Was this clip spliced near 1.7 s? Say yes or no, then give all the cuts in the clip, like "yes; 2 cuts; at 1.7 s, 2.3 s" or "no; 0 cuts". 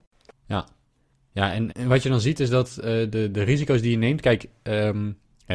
yes; 1 cut; at 1.7 s